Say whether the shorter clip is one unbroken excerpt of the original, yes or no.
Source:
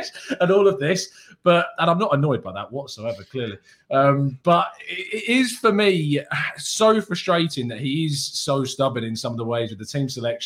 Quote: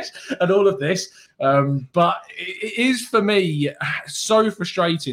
no